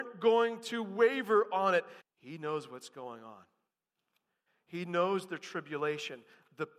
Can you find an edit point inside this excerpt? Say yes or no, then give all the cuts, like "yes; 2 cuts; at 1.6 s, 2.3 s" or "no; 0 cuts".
yes; 1 cut; at 2.0 s